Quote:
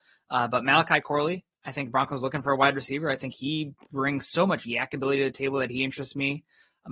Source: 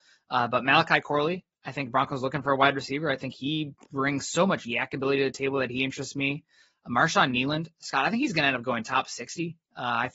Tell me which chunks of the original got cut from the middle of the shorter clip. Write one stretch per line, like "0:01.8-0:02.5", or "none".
none